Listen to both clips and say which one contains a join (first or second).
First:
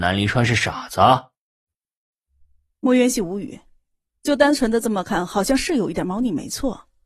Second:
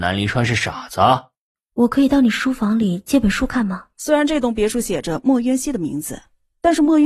second